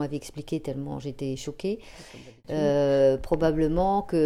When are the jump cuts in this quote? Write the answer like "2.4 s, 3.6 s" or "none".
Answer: none